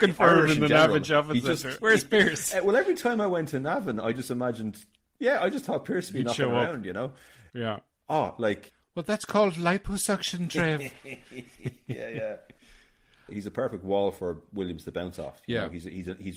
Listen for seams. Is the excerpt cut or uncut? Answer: cut